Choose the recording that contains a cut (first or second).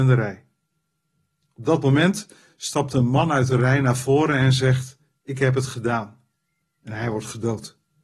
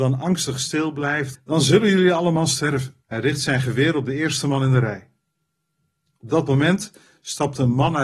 second